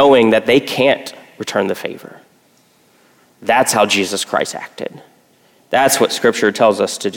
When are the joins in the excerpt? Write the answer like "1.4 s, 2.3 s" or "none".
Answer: none